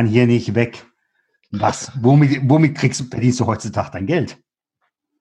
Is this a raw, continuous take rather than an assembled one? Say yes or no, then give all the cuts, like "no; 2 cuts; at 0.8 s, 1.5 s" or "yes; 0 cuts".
yes; 0 cuts